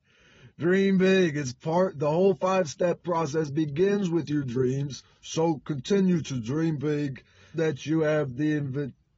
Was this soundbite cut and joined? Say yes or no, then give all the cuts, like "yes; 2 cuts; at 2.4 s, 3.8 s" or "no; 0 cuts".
yes; 1 cut; at 7.5 s